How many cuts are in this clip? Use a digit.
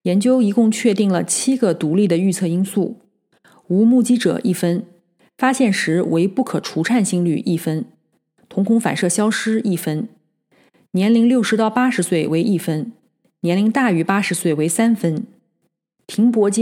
0